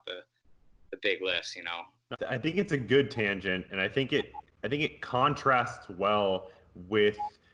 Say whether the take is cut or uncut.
cut